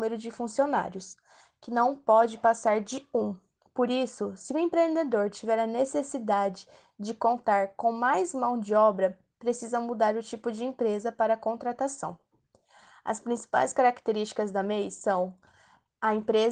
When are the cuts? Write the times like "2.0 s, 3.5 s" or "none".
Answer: none